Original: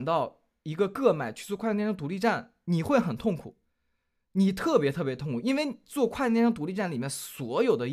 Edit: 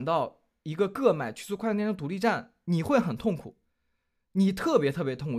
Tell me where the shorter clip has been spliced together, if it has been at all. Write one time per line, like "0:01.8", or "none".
none